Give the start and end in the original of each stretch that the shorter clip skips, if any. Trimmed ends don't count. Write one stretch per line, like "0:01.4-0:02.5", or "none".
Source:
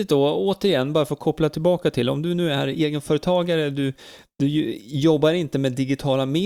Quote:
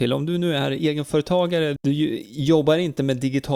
0:03.7-0:04.3

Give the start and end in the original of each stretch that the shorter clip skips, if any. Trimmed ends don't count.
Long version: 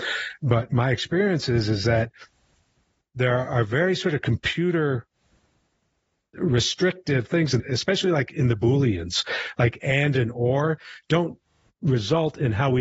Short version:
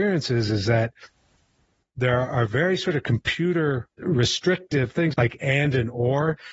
0:05.1-0:06.3
0:07.5-0:09.5

